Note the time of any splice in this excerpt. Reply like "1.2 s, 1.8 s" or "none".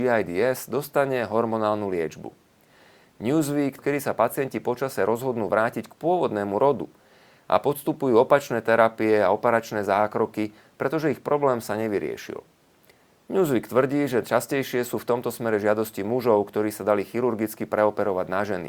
3.8 s